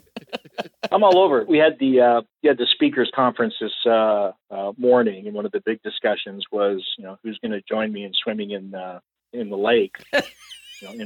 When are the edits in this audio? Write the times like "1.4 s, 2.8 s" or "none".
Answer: 1.5 s